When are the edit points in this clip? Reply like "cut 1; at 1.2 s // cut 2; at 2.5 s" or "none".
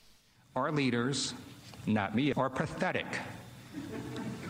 cut 1; at 2.3 s